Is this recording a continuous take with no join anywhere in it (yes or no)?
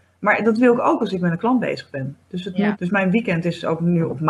no